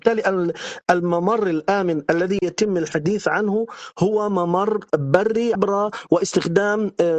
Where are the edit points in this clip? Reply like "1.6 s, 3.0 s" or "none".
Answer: 5.6 s